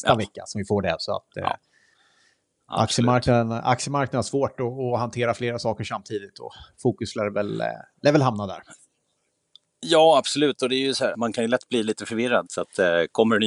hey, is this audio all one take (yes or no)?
no